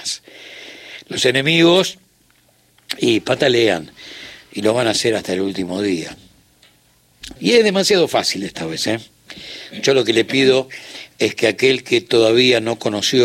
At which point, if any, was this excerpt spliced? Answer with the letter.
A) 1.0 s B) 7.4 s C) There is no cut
B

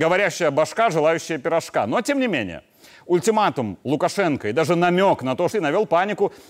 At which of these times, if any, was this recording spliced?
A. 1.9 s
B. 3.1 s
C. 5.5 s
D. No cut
C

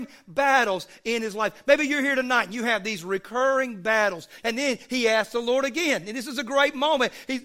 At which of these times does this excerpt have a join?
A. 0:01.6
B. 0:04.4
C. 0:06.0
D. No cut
B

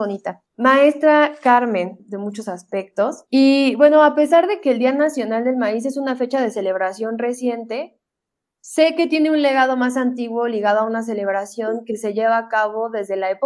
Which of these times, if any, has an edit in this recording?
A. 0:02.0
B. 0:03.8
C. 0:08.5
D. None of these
A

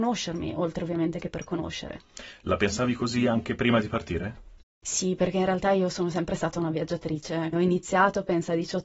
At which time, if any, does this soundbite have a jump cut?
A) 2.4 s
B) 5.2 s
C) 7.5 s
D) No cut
C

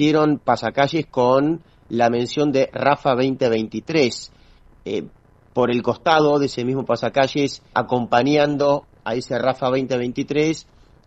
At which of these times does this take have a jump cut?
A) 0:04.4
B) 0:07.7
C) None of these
B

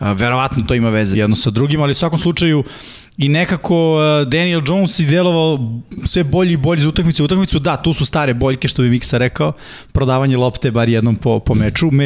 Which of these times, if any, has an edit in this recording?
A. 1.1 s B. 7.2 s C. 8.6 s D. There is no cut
A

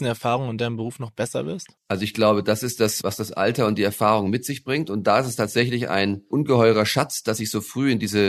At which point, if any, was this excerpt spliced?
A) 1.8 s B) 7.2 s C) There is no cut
A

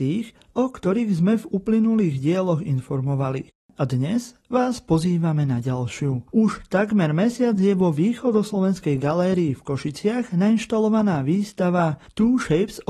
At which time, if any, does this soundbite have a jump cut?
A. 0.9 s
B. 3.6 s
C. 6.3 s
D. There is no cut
C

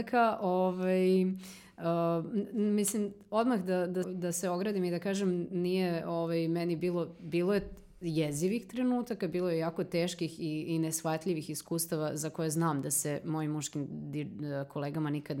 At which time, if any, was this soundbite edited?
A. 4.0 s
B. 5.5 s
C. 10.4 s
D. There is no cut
A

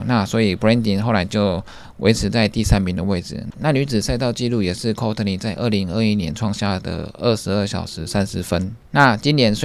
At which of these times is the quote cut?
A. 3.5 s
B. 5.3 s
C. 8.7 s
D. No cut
A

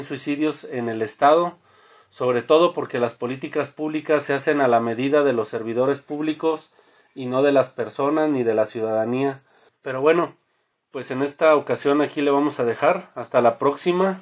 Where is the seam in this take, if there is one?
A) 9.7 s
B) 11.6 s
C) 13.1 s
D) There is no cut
A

